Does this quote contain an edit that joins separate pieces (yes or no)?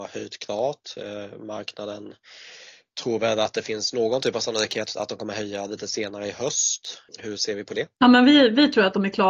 no